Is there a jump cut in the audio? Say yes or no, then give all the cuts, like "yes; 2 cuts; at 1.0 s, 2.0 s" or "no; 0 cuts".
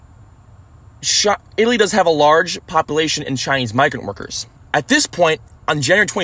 yes; 1 cut; at 4.6 s